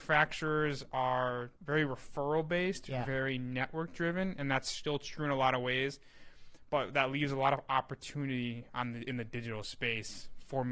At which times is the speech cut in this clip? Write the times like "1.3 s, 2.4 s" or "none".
1.6 s